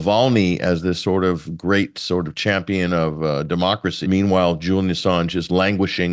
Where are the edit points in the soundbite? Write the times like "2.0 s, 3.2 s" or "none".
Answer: 4.0 s